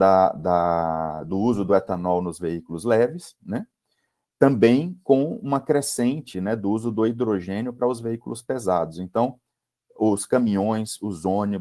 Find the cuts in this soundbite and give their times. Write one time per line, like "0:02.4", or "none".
none